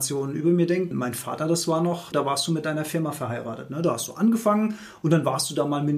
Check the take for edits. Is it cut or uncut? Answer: cut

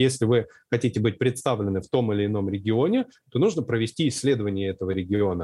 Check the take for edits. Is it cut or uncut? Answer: uncut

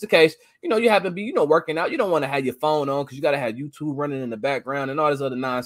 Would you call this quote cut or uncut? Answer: uncut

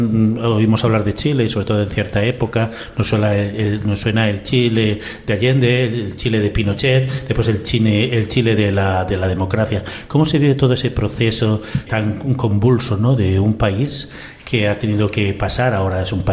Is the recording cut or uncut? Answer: cut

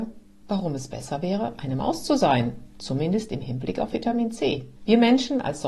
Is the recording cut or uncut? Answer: cut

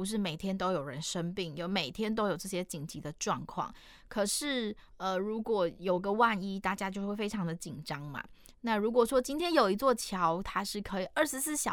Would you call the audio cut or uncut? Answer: uncut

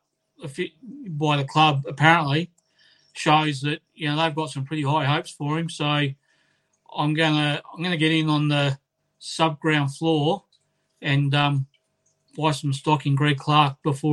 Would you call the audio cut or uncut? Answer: cut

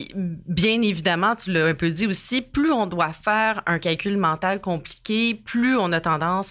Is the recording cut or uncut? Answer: uncut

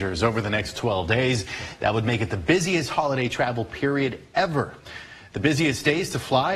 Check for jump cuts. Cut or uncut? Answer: uncut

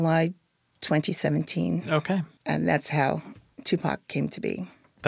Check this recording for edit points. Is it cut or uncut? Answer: cut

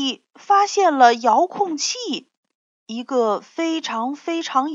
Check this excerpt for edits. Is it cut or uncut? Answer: cut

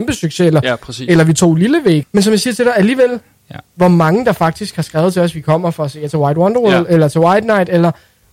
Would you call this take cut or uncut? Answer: cut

